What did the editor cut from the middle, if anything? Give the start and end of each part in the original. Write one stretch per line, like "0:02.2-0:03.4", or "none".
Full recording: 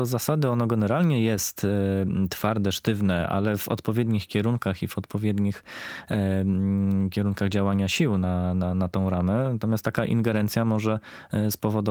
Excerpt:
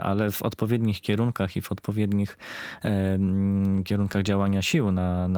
none